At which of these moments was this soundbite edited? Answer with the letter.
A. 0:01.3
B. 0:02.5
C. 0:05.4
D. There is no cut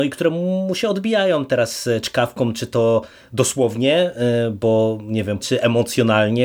C